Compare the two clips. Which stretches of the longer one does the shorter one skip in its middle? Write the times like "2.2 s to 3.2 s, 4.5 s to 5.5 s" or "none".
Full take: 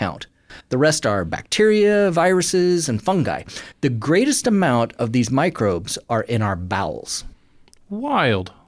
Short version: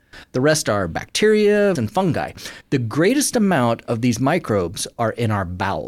2.1 s to 2.9 s